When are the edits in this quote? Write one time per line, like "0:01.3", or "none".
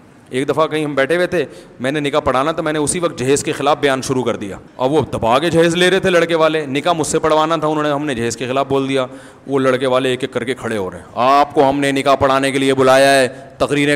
0:04.7